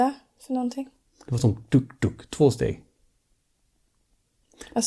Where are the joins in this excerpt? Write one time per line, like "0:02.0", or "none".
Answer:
none